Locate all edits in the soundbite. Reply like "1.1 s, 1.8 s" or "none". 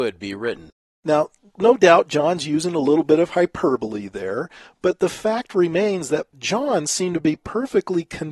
none